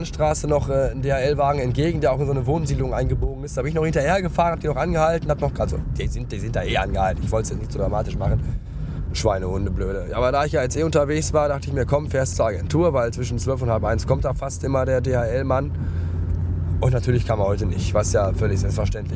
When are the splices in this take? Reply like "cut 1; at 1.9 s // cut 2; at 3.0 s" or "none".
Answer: cut 1; at 9.1 s // cut 2; at 12.3 s